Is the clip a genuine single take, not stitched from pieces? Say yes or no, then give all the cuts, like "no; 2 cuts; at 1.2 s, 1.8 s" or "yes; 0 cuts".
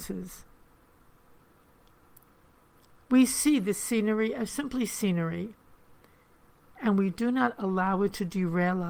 yes; 0 cuts